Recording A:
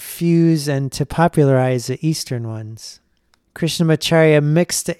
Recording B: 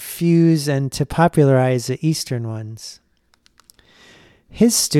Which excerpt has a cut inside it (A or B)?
A